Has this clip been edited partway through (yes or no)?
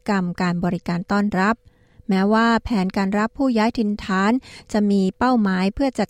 no